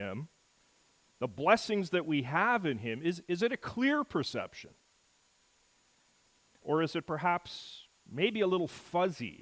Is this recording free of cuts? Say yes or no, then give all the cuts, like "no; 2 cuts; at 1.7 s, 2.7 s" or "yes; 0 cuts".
yes; 0 cuts